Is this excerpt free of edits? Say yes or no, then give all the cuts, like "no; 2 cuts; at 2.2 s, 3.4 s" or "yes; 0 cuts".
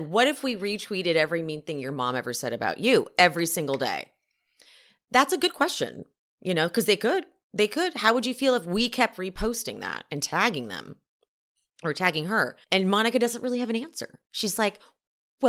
no; 1 cut; at 12.6 s